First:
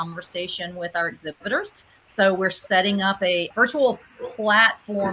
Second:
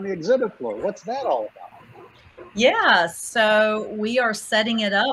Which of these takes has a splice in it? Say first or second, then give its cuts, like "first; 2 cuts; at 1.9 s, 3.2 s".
first; 1 cut; at 3.5 s